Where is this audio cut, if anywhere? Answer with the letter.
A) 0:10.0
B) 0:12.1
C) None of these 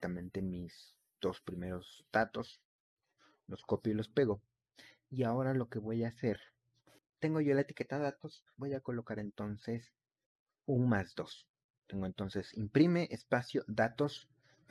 C